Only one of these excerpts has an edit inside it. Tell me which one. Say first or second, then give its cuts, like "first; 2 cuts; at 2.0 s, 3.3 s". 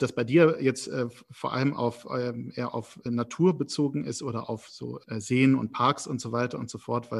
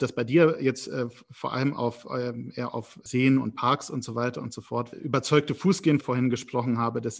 second; 3 cuts; at 3.1 s, 4.9 s, 6.0 s